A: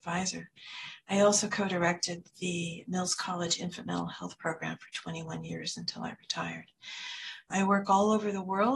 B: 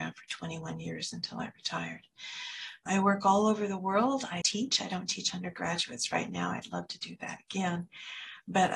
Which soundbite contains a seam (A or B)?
B